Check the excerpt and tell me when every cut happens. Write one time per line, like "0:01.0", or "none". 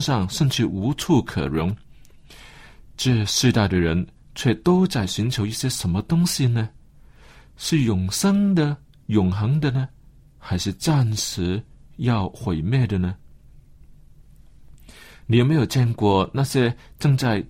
none